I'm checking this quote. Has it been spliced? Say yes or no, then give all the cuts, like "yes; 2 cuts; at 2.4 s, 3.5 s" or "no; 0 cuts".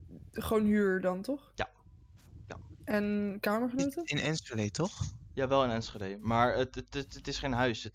no; 0 cuts